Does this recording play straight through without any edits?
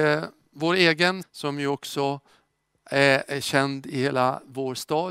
no; 1 cut; at 1.2 s

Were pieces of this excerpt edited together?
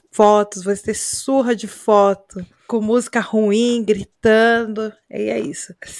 no; 0 cuts

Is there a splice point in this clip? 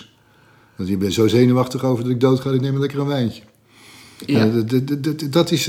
no; 0 cuts

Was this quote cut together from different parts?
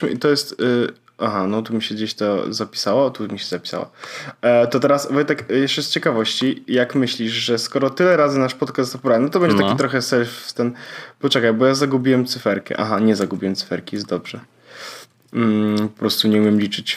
no; 0 cuts

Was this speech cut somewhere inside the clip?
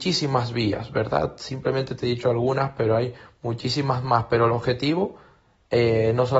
no; 0 cuts

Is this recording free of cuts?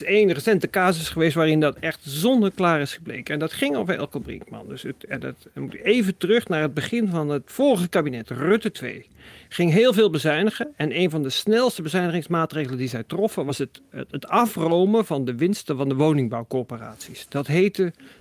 yes; 0 cuts

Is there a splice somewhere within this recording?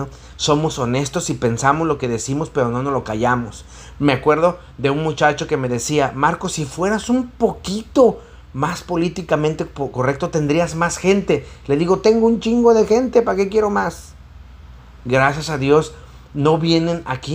no; 0 cuts

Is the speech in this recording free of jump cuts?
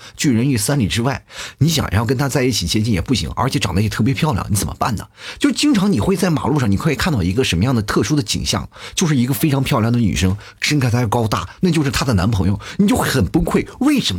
no; 1 cut; at 11.6 s

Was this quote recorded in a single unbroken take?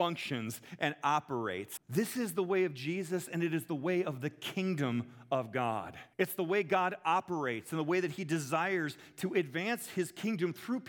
no; 2 cuts; at 1.8 s, 6.1 s

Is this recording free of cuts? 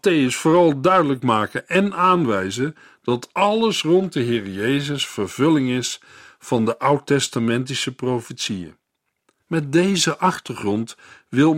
no; 1 cut; at 9.4 s

